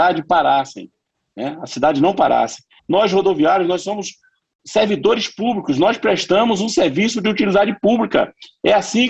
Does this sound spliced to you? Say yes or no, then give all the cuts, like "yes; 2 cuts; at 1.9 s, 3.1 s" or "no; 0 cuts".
yes; 1 cut; at 2.8 s